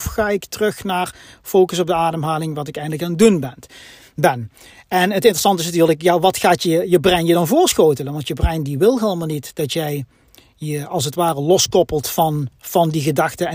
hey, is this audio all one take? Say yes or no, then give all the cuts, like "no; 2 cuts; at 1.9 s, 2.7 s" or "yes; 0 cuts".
yes; 0 cuts